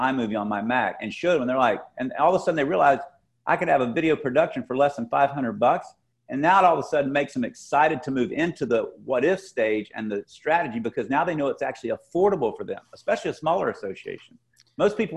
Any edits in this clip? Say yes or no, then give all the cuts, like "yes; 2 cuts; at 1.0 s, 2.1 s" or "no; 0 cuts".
no; 0 cuts